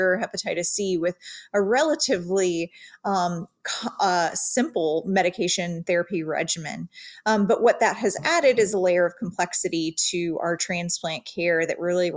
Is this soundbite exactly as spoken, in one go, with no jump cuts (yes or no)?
yes